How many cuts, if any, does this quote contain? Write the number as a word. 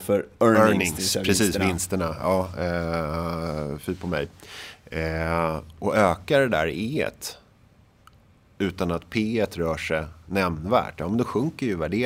zero